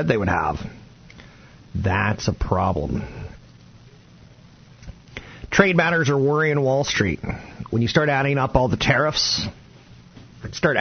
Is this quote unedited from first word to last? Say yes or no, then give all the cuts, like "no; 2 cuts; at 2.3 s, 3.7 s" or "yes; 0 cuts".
yes; 0 cuts